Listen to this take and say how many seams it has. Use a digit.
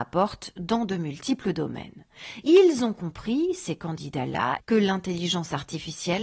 1